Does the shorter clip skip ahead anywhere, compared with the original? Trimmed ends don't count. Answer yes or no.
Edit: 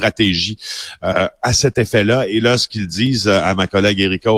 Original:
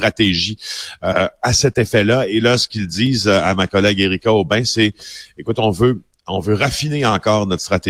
no